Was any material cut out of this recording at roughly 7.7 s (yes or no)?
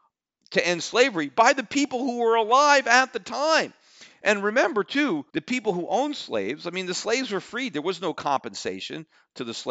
no